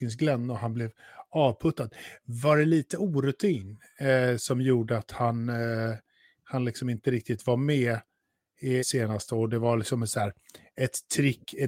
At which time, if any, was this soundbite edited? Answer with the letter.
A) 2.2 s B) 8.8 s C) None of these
B